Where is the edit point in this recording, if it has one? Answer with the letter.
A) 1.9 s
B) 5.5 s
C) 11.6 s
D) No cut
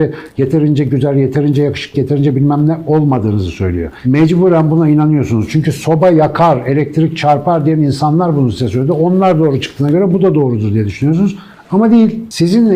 A